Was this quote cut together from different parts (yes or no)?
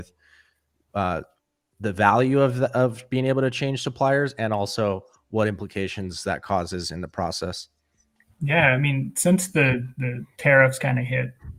no